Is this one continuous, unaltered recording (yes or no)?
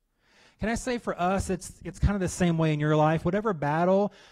yes